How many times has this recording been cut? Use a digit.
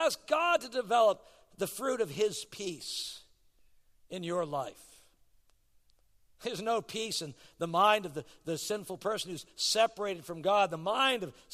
1